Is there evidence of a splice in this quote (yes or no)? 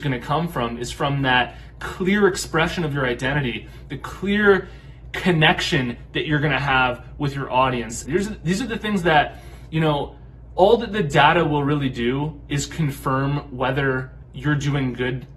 yes